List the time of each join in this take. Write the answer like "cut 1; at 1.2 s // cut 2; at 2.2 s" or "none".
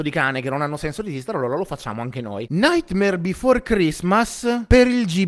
cut 1; at 2.5 s